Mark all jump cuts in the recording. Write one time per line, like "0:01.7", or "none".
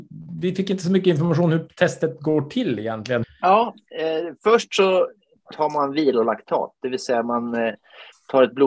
0:03.2